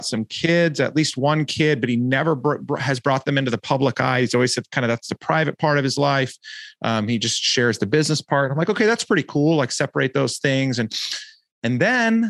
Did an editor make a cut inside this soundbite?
no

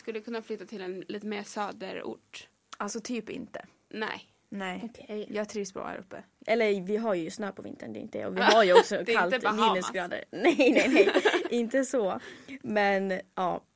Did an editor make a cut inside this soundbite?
yes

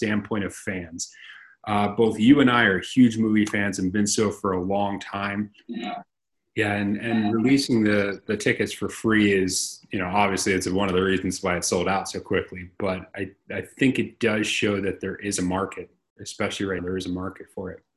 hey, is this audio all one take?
no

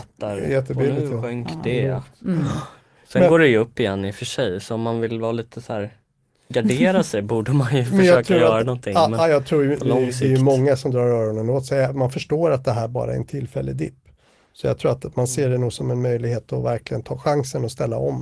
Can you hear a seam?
no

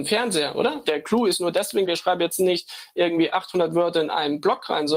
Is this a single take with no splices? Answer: no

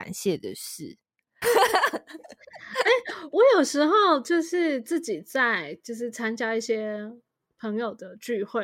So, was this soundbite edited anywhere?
yes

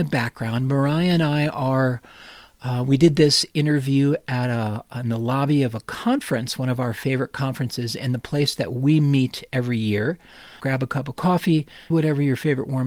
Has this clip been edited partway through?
yes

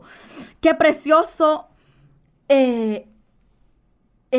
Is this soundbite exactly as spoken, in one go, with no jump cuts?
yes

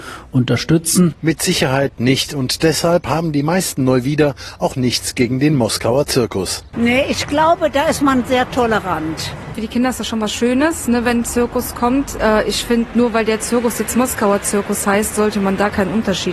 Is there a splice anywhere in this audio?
yes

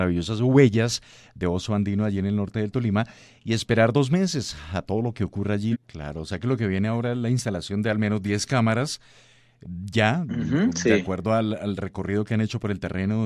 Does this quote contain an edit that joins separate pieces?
yes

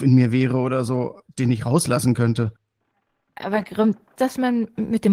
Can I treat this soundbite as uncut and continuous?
no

